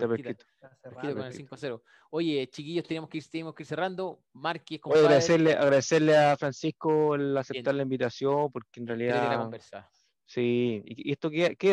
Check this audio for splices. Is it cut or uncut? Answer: uncut